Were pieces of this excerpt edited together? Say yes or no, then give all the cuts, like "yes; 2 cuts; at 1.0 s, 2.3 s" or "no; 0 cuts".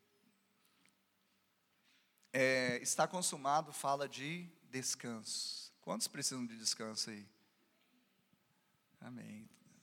no; 0 cuts